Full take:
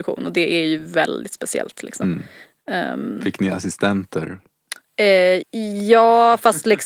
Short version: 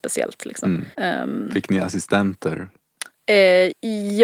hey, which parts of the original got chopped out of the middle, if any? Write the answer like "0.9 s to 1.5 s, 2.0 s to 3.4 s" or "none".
2.3 s to 2.6 s